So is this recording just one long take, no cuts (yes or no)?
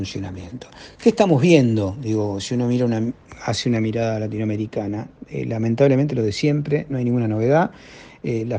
yes